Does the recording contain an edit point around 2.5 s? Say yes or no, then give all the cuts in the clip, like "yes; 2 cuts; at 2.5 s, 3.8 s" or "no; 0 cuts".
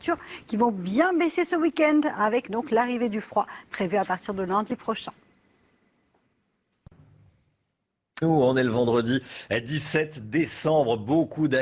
no; 1 cut; at 8.2 s